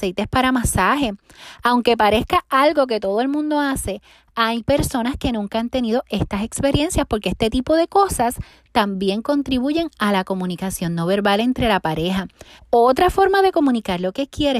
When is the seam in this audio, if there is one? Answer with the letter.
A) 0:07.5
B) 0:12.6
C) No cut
B